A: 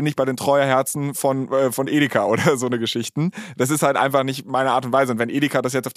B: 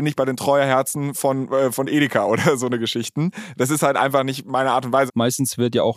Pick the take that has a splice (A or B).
B